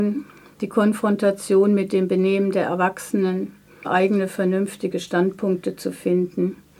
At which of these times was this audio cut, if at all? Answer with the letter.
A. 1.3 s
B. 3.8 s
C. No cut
B